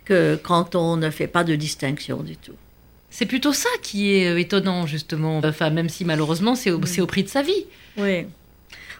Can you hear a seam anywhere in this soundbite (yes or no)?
yes